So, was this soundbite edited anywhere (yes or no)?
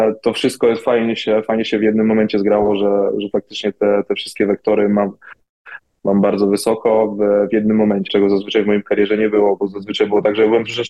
yes